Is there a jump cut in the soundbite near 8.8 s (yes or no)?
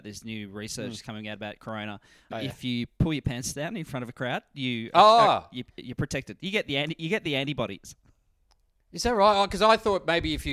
no